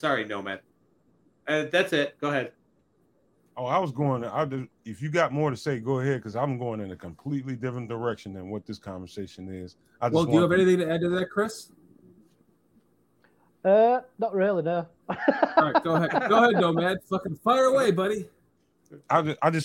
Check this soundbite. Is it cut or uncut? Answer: cut